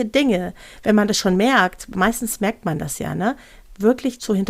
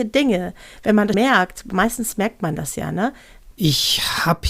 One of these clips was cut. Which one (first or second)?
second